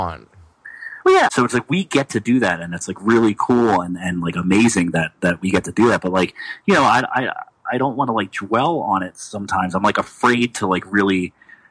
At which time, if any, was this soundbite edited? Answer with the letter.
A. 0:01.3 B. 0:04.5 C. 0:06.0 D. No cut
A